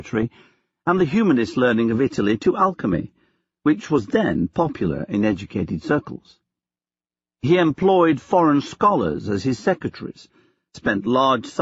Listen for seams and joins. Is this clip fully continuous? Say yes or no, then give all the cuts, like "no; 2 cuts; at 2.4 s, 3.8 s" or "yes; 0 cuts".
yes; 0 cuts